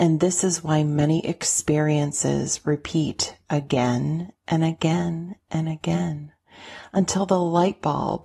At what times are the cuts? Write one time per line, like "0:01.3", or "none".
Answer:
none